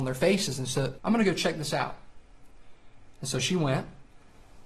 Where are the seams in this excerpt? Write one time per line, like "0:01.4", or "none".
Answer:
0:01.0